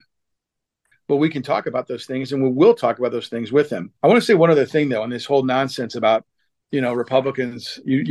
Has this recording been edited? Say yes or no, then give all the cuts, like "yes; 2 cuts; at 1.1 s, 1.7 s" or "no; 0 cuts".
yes; 2 cuts; at 0.9 s, 4.0 s